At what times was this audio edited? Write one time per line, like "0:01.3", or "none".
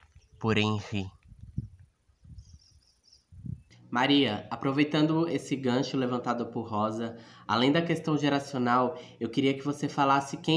none